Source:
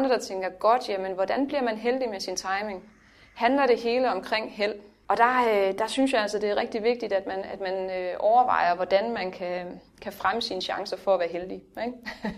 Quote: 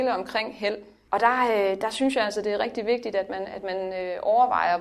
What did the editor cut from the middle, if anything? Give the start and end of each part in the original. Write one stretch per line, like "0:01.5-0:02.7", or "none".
none